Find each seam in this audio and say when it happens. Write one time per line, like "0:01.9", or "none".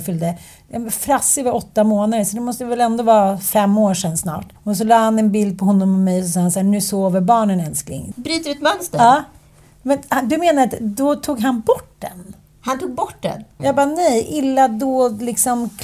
0:04.6
0:08.1
0:13.6